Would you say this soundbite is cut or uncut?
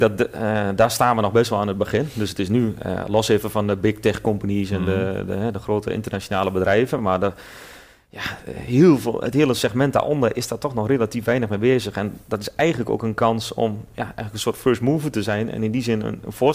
uncut